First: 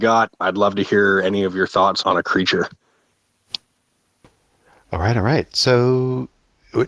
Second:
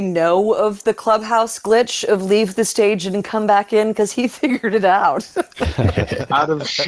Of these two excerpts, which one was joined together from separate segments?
first; 1 cut; at 2.0 s

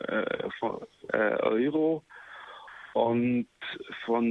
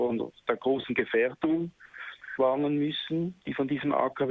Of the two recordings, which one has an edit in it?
first; 1 cut; at 1.1 s

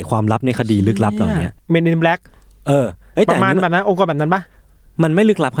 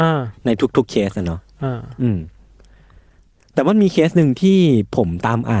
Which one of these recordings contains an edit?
first; 1 cut; at 1.6 s

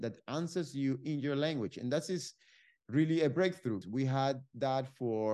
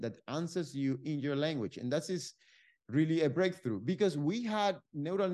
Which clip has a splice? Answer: first; 1 cut; at 3.8 s

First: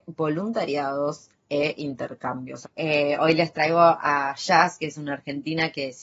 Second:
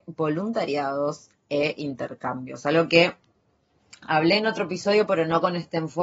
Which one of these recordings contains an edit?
first; 1 cut; at 2.6 s

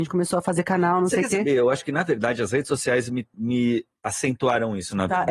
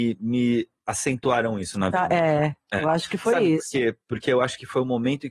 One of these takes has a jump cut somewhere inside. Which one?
first; 1 cut; at 3.3 s

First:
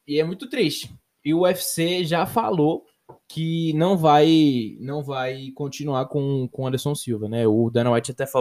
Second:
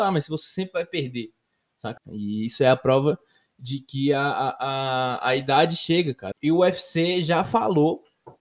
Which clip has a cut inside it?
second; 2 cuts; at 2.0 s, 6.3 s

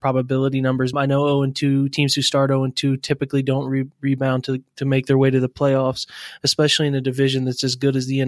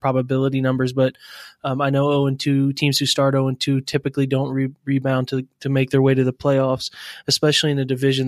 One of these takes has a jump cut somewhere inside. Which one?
first; 1 cut; at 0.9 s

